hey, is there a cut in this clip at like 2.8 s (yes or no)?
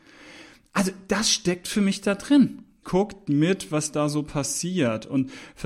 yes